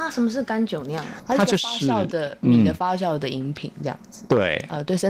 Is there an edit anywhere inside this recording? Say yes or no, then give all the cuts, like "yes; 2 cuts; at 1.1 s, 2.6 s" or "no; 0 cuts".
no; 0 cuts